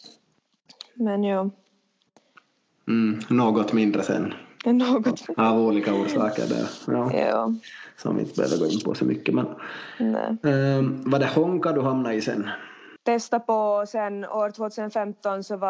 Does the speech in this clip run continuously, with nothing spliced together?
no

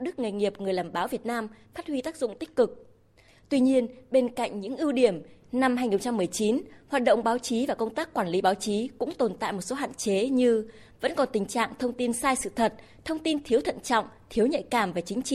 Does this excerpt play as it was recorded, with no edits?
yes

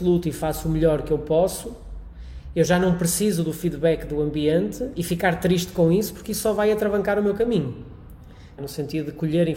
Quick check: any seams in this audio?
yes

